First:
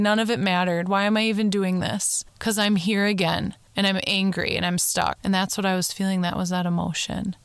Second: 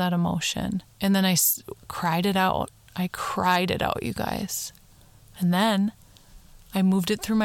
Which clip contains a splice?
second; 1 cut; at 1.8 s

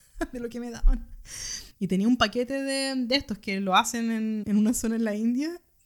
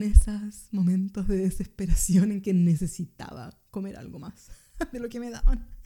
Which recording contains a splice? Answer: first; 2 cuts; at 1.7 s, 4.4 s

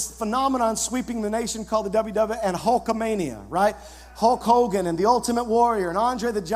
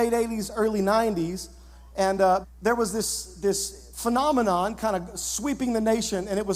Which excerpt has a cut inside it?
second; 1 cut; at 2.4 s

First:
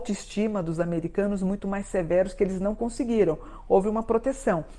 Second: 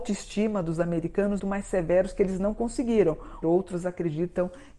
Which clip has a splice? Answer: second; 2 cuts; at 1.4 s, 3.4 s

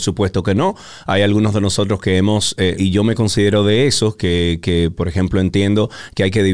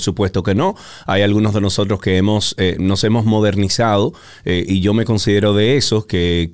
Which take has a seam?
first; 1 cut; at 2.8 s

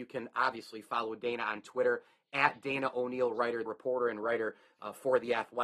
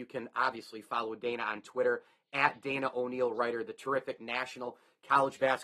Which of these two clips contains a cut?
first; 1 cut; at 3.7 s

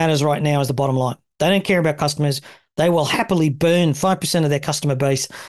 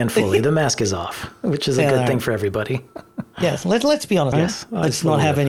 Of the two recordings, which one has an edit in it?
second; 1 cut; at 4.3 s

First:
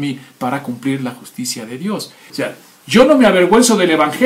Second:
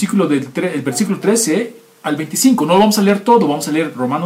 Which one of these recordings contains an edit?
first; 1 cut; at 2.3 s

